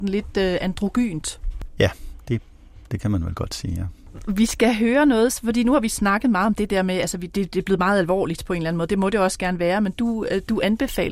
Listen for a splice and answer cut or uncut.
uncut